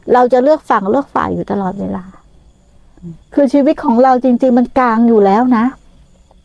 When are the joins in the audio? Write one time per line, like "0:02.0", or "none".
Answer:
0:03.2